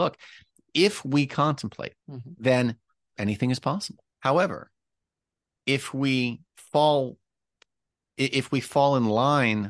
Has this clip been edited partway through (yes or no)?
yes